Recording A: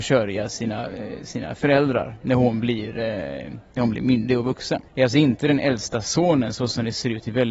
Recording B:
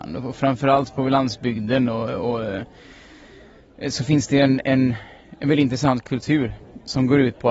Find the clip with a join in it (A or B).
A